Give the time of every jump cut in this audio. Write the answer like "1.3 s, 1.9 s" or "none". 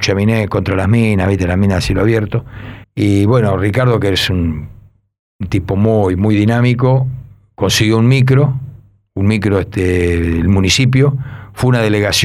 2.8 s